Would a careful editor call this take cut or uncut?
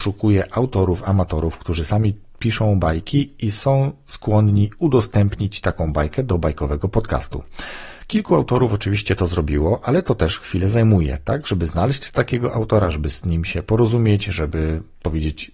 uncut